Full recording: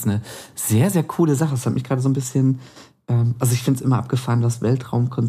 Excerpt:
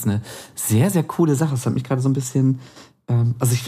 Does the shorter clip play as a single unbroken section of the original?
yes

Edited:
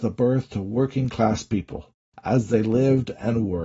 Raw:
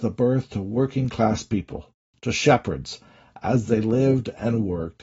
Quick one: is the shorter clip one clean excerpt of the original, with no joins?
no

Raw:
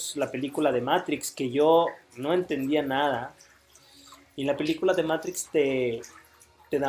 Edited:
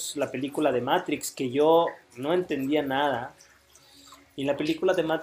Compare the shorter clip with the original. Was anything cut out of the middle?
no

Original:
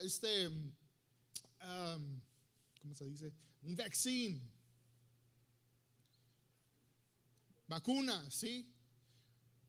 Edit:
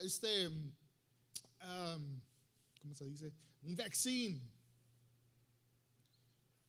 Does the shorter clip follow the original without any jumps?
yes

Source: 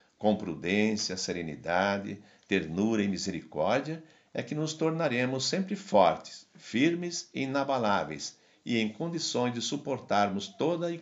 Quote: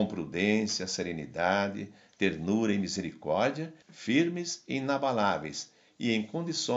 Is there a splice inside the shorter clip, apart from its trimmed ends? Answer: yes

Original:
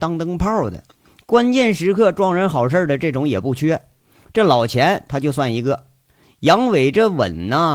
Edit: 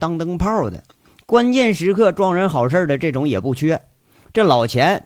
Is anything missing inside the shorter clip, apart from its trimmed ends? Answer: no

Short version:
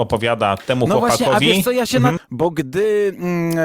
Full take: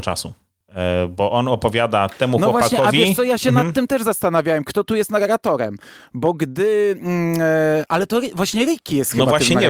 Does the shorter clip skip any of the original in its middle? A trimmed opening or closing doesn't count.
yes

